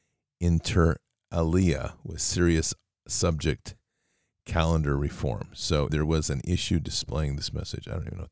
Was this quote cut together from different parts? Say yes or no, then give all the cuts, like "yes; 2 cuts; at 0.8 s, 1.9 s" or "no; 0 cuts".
yes; 1 cut; at 5.9 s